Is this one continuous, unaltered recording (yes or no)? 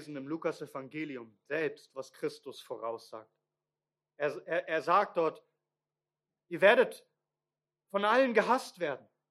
yes